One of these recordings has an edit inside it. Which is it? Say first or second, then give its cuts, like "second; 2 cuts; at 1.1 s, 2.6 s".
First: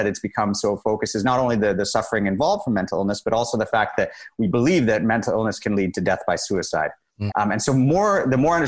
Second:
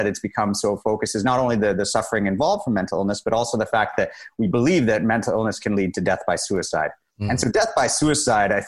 first; 1 cut; at 7.3 s